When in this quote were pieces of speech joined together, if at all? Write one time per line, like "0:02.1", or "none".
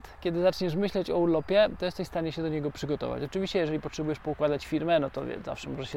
none